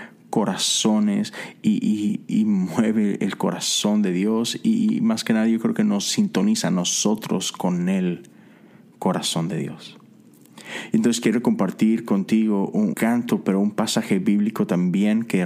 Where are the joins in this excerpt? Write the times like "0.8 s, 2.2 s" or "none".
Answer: 12.9 s